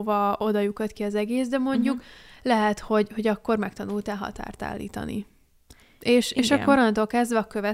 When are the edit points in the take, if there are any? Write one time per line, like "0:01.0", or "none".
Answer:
none